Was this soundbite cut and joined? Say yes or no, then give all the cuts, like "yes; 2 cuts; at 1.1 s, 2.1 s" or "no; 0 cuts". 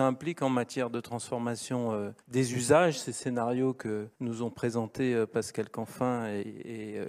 yes; 2 cuts; at 2.2 s, 4.1 s